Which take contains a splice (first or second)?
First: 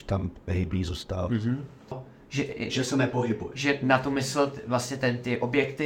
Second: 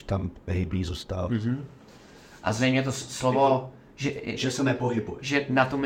first